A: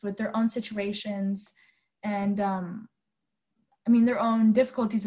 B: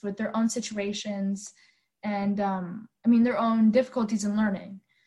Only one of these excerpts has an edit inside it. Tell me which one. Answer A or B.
B